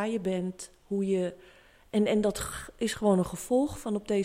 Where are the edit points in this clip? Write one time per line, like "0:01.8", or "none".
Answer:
none